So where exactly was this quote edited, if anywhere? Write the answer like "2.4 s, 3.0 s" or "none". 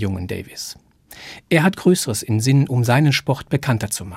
none